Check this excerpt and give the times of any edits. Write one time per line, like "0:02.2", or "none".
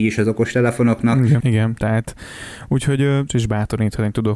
0:01.4
0:03.3